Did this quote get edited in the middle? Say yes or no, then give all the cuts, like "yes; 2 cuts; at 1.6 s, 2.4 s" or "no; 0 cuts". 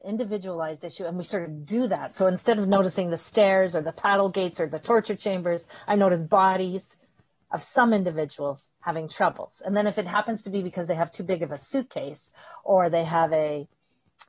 no; 0 cuts